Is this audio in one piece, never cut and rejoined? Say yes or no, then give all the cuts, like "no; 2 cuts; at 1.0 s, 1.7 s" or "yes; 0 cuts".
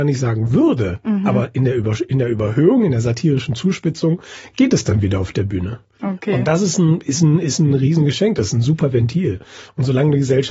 yes; 0 cuts